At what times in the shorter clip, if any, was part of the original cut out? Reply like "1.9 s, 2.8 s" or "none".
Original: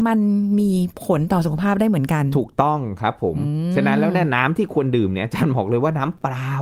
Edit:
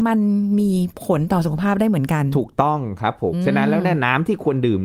3.3 s